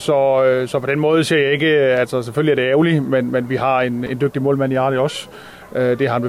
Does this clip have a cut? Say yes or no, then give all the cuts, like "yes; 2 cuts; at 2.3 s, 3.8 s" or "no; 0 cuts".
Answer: yes; 1 cut; at 4.1 s